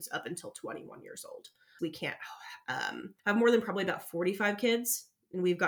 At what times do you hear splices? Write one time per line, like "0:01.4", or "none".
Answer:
0:01.8
0:03.2